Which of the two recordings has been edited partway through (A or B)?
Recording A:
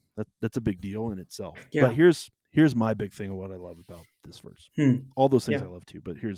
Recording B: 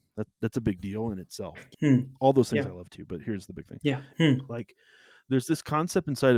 B